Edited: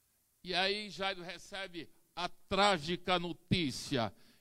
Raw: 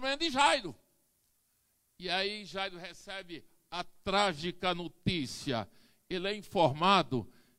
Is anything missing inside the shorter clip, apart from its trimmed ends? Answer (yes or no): no